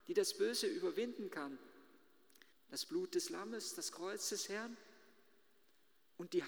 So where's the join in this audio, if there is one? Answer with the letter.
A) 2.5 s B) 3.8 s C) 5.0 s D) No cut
A